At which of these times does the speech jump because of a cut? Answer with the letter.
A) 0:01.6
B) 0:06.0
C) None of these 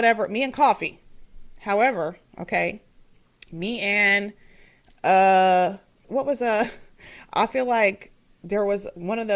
B